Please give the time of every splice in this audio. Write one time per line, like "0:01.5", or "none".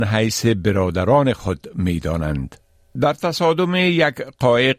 0:03.0